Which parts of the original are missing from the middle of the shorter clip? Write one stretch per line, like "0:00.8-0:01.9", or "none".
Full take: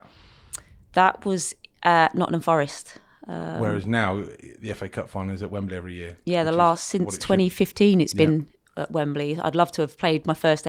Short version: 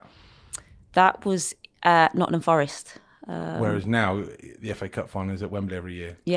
none